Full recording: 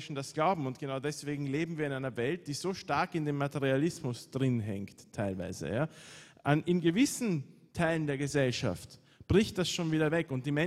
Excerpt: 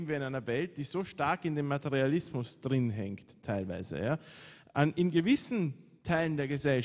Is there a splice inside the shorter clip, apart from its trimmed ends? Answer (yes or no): no